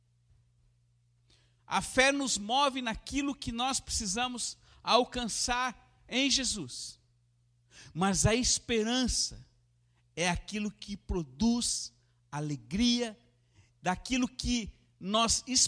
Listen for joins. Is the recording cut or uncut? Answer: cut